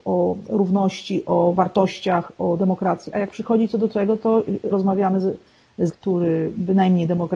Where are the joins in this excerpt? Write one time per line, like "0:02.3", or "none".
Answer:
0:04.7
0:05.9

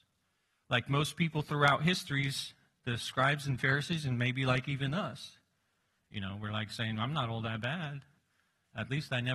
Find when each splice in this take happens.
none

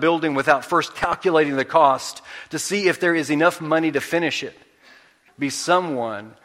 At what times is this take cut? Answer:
0:05.3

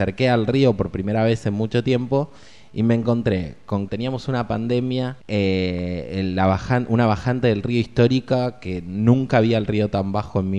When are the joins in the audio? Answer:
0:03.9
0:05.2

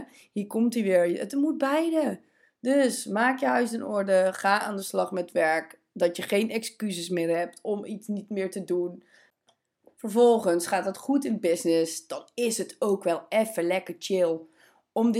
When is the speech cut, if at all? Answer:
none

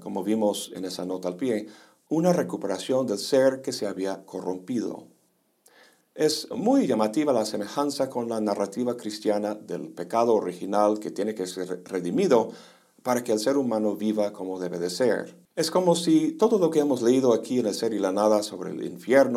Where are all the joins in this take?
0:15.5

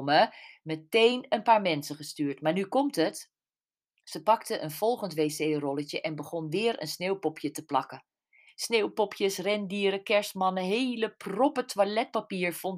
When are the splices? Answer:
0:08.5

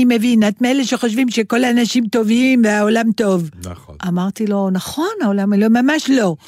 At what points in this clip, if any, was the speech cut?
none

